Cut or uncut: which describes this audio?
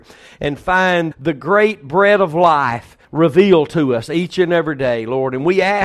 cut